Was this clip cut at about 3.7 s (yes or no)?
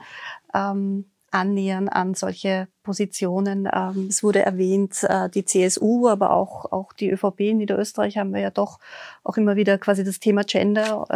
no